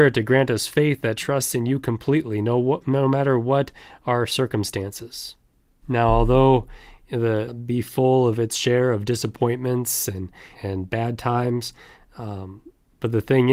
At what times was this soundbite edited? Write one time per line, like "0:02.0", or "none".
0:05.8
0:07.5
0:10.6